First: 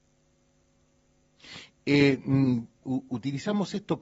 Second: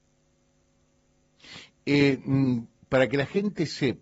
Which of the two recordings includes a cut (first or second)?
first